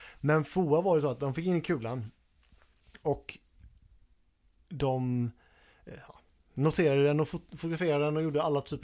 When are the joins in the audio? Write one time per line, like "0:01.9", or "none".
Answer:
none

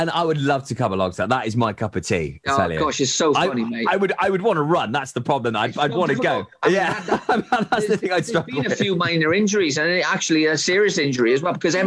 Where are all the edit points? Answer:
0:06.6

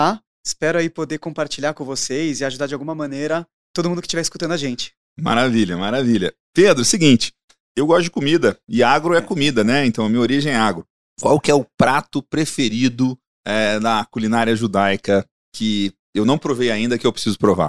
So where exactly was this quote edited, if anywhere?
none

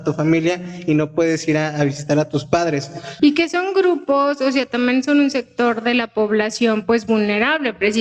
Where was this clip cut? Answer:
0:03.2

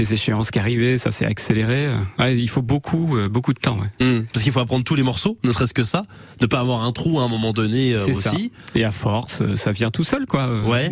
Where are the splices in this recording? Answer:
none

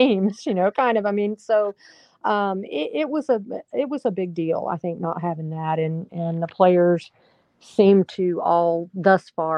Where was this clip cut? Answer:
none

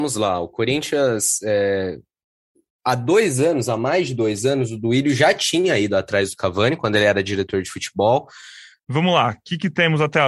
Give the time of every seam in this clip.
0:08.8

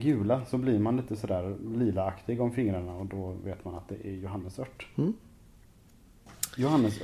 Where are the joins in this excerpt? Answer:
none

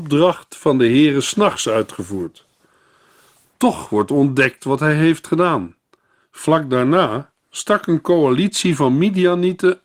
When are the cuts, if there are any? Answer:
0:06.2

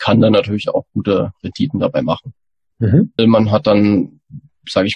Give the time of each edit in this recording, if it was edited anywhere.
0:03.2

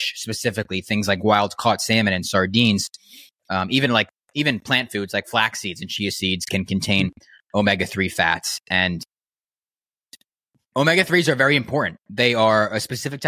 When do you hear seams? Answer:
none

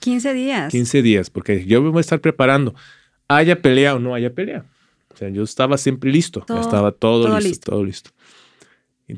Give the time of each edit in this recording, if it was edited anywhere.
0:06.5
0:07.6

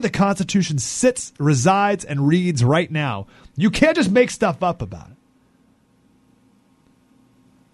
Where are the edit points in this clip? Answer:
none

